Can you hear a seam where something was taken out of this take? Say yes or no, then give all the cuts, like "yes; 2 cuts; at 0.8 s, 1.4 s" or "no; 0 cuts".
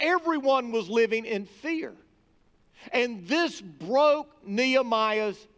no; 0 cuts